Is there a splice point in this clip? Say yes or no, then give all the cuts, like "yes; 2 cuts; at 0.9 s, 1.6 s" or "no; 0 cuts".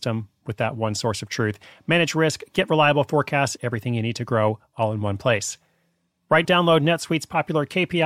yes; 2 cuts; at 3.6 s, 6.4 s